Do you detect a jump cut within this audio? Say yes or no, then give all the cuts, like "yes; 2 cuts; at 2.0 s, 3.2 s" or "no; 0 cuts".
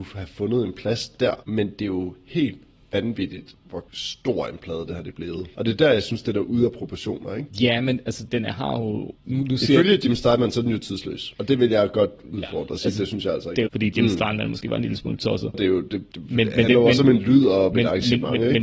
yes; 3 cuts; at 8.3 s, 13.7 s, 15.5 s